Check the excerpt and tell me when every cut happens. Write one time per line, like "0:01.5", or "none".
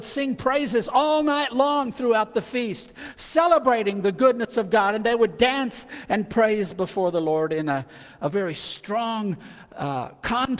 none